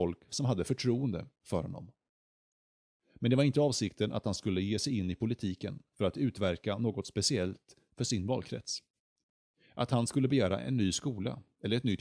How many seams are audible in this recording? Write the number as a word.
zero